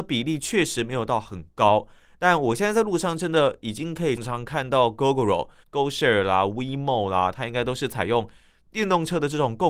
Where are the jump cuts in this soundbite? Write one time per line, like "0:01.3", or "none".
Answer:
0:04.2
0:05.6

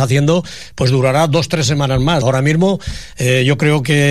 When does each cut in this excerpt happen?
0:02.2

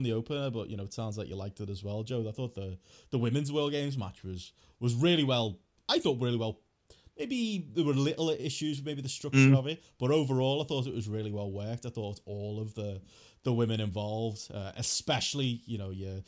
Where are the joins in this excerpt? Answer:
none

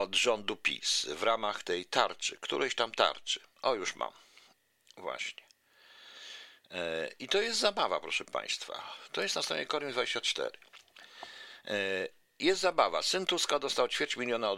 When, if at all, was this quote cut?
none

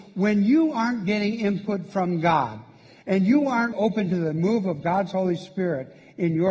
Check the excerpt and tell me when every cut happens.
0:03.7

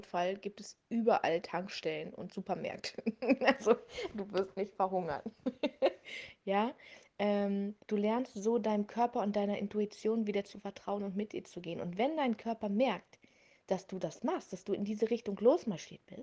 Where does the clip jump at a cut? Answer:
none

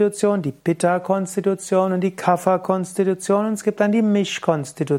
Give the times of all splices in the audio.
none

